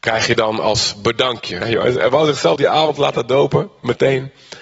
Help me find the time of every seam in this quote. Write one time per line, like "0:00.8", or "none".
0:01.6